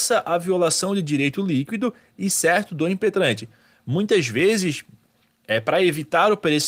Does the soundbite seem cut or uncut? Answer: uncut